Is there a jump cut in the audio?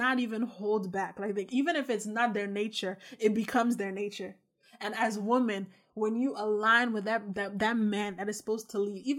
no; 0 cuts

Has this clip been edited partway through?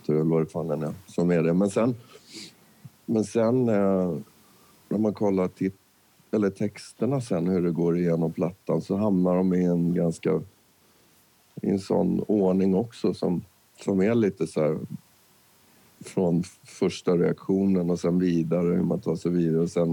no; 0 cuts

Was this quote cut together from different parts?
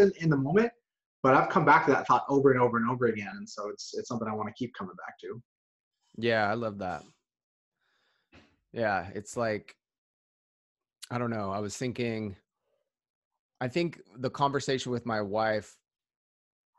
no; 0 cuts

